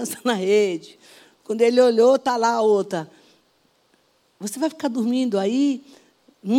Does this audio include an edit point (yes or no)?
no